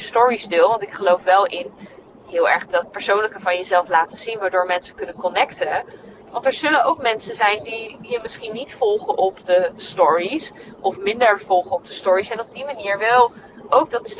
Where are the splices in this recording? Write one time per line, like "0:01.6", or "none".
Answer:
0:06.2